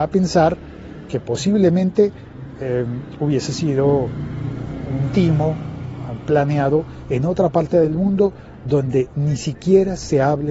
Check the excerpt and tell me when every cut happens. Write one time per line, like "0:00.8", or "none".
none